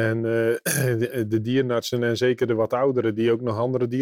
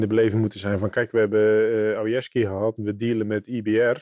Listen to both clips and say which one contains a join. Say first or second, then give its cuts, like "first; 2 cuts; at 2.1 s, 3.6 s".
second; 1 cut; at 2.7 s